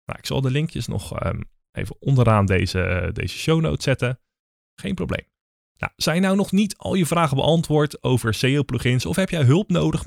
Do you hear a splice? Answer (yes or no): yes